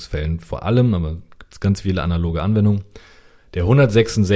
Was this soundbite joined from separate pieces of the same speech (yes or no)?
no